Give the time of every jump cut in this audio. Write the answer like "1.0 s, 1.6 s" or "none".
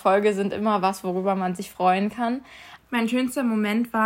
2.8 s